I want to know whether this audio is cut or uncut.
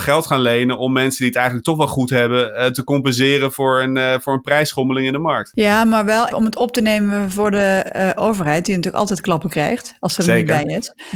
cut